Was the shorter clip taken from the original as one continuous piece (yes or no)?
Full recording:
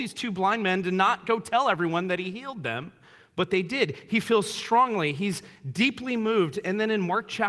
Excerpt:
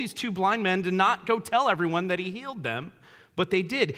yes